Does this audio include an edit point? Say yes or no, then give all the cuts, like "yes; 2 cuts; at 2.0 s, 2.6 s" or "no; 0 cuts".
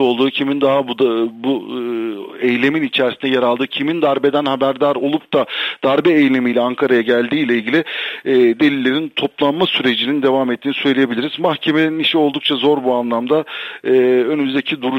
no; 0 cuts